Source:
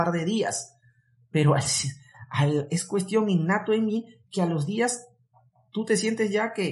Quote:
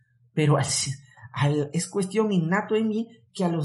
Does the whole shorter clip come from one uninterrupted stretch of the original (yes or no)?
yes